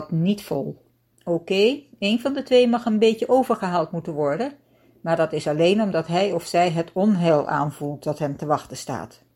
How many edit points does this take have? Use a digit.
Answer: 1